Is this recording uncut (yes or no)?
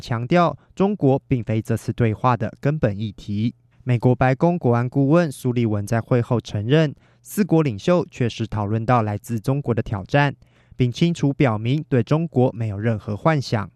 no